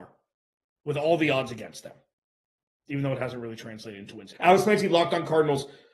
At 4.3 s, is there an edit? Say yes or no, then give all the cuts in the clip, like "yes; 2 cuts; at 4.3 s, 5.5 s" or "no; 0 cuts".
yes; 1 cut; at 4.3 s